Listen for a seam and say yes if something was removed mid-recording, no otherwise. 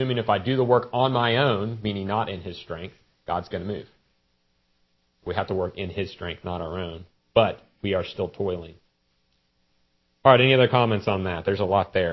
no